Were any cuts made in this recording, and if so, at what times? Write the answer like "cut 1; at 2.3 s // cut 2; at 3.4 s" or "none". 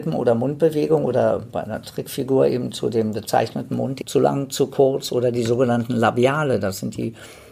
cut 1; at 4.0 s